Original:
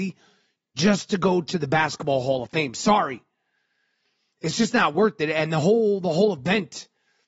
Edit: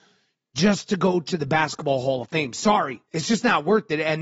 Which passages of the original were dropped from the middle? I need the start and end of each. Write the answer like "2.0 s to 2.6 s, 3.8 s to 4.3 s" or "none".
3.3 s to 4.3 s